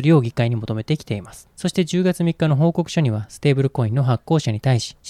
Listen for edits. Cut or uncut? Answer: uncut